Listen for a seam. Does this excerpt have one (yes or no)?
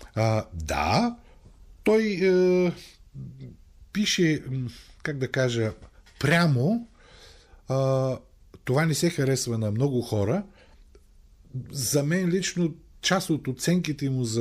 no